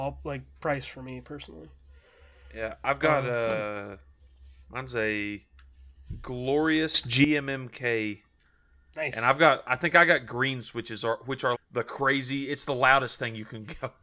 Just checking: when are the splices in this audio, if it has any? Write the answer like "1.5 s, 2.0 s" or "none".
11.5 s